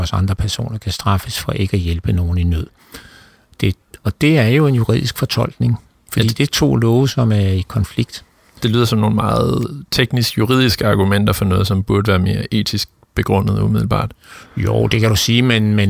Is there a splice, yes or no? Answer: no